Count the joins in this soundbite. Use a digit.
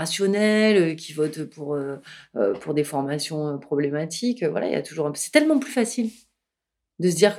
0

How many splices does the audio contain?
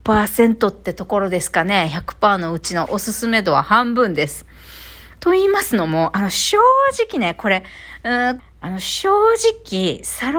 1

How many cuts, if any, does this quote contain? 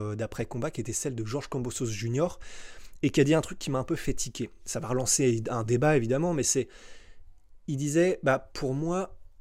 0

